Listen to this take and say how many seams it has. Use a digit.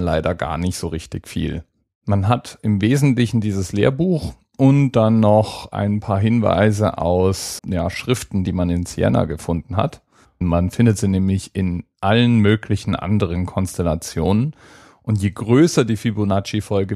2